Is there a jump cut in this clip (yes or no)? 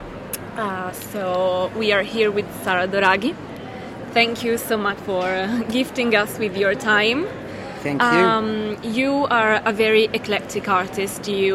yes